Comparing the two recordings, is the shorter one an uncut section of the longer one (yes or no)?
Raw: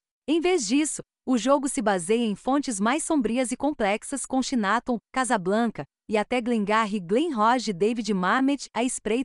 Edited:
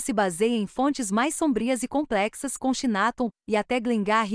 no